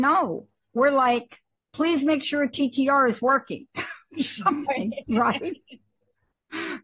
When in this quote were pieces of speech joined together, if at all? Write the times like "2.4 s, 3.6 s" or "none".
1.6 s